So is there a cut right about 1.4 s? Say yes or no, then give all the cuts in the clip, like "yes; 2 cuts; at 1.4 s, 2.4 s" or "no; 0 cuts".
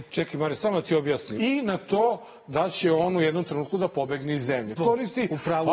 yes; 2 cuts; at 1.4 s, 4.8 s